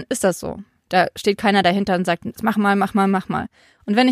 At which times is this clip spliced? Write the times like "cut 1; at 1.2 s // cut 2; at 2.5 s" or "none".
none